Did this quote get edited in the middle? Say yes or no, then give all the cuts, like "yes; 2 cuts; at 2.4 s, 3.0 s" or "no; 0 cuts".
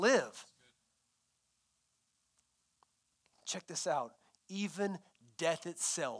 no; 0 cuts